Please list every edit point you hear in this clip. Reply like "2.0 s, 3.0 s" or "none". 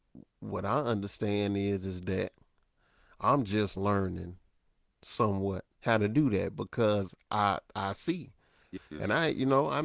3.8 s, 5.7 s, 8.8 s